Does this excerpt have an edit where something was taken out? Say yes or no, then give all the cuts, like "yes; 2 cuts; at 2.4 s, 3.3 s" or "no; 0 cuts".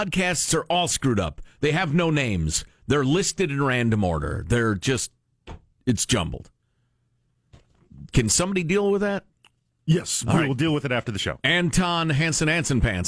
no; 0 cuts